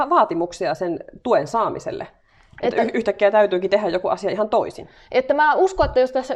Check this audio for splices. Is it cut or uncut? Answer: uncut